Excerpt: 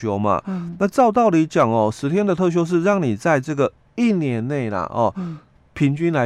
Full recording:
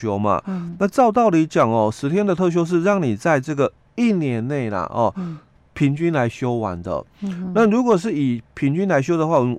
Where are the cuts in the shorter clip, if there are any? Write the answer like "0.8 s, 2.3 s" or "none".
none